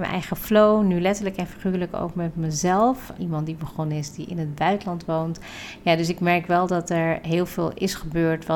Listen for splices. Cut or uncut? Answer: cut